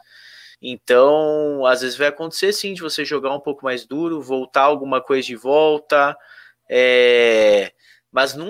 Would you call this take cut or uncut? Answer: uncut